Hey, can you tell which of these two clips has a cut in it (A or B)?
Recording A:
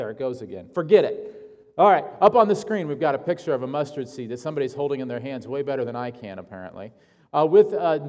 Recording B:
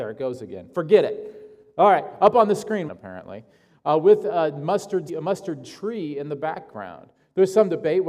B